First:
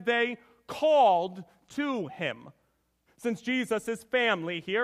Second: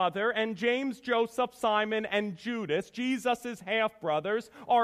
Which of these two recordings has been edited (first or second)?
first